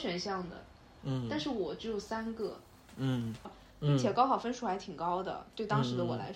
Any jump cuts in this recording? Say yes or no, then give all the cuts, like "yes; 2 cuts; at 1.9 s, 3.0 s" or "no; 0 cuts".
yes; 1 cut; at 3.4 s